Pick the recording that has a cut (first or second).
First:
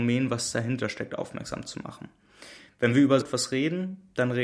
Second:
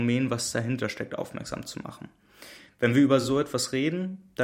first